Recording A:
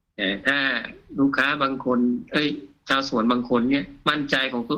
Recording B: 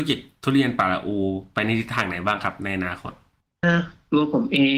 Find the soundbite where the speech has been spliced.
B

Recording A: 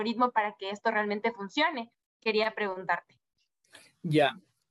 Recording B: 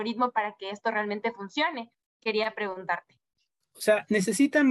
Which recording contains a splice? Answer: B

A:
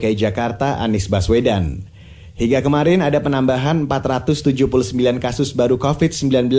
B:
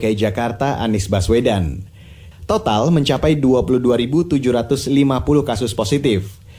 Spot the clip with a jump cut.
B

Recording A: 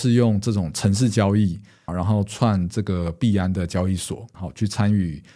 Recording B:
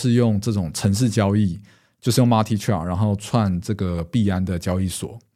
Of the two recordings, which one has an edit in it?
A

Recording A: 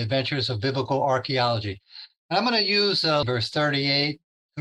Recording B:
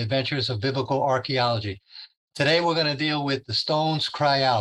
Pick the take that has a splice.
A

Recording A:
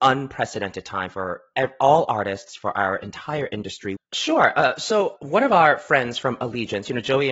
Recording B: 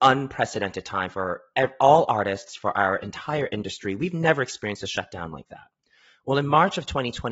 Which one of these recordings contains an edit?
A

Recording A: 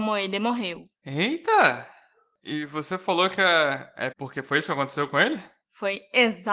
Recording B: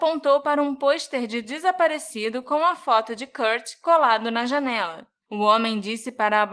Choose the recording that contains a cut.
A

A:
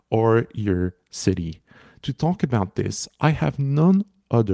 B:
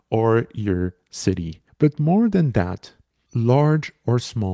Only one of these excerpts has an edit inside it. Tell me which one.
B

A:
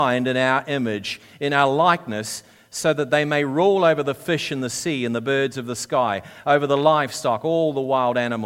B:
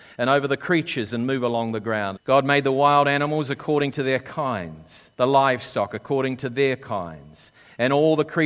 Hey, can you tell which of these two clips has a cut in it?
B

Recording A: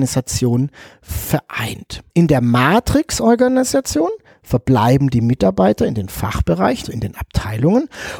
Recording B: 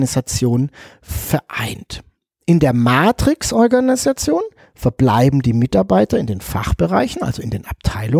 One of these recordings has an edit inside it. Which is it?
A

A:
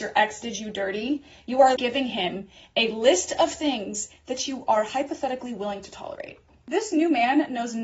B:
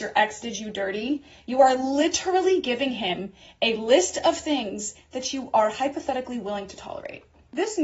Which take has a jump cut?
A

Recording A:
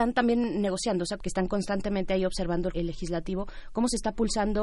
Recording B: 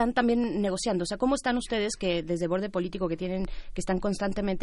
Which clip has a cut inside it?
A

